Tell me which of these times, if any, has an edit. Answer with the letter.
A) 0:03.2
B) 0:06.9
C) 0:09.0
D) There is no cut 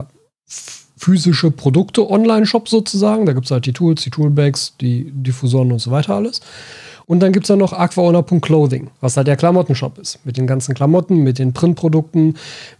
C